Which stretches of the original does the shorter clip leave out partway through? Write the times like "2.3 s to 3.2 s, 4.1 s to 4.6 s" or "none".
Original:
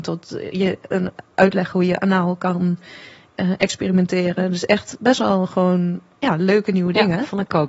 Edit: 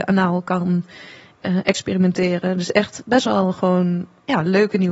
none